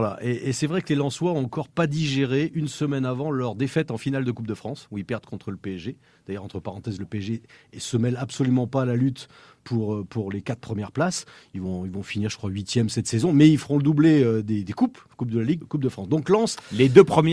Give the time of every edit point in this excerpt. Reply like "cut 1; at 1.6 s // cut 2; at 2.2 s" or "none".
cut 1; at 15.6 s